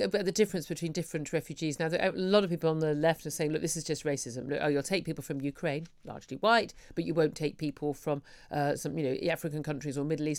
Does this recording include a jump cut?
no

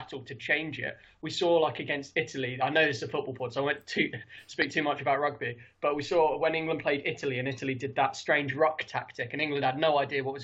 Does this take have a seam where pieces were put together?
no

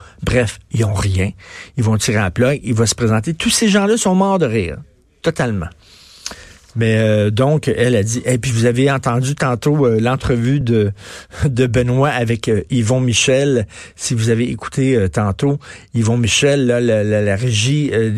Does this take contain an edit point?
no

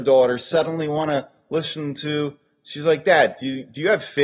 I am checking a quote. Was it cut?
no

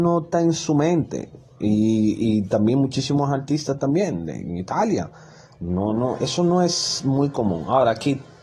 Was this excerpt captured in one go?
yes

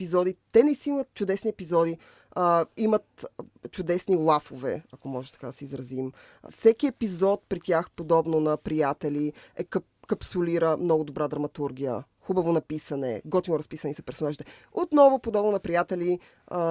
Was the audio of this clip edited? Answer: yes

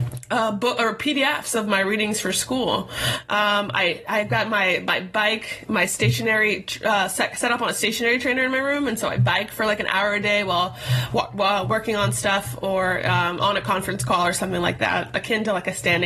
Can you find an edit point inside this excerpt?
no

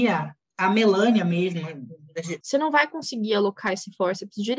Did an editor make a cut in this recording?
yes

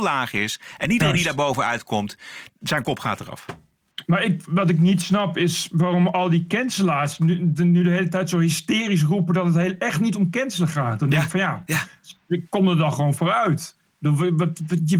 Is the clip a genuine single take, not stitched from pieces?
yes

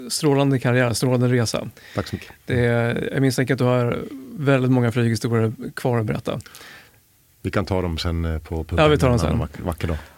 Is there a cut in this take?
no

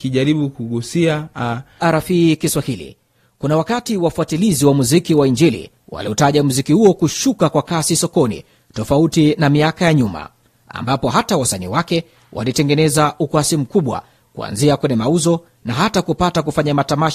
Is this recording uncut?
no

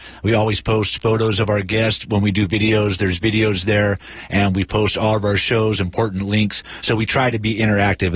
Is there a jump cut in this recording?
no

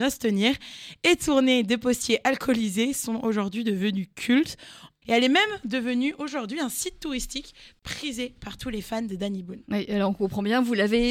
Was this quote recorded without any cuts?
no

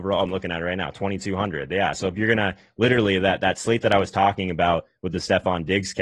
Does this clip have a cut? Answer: no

